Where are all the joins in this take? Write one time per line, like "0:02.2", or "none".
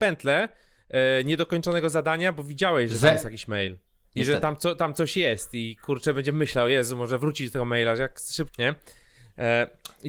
0:04.0
0:08.5

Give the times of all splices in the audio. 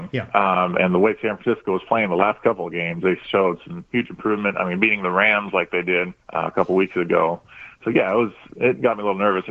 0:06.2

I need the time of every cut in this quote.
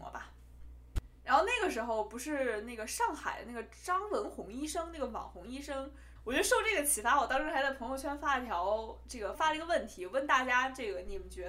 0:06.2
0:09.3

